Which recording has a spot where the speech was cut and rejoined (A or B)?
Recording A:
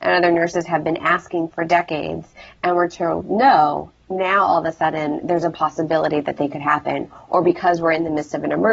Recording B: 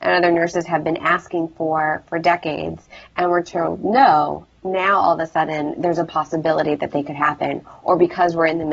A